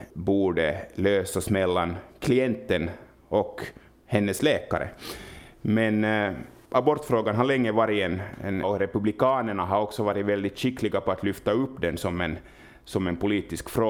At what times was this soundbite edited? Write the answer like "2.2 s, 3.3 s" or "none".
8.6 s